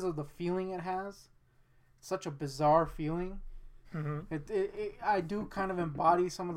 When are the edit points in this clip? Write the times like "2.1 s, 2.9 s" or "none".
3.8 s